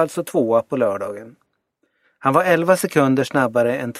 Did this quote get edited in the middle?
yes; 1 cut; at 2.0 s

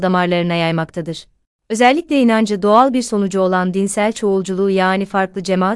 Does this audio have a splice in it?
no; 0 cuts

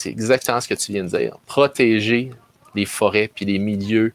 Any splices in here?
no; 0 cuts

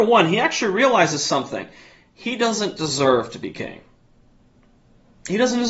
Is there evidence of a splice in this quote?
no; 0 cuts

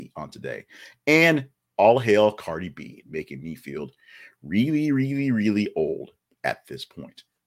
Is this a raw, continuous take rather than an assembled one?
no; 1 cut; at 3.0 s

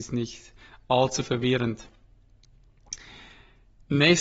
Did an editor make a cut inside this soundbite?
no; 0 cuts

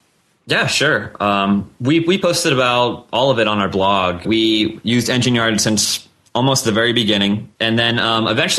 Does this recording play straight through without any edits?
no; 2 cuts; at 4.2 s, 7.6 s

